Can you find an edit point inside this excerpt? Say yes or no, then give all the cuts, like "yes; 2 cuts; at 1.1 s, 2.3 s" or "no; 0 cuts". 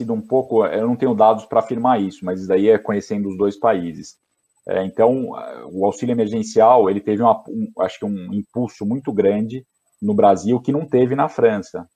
yes; 2 cuts; at 4.6 s, 7.7 s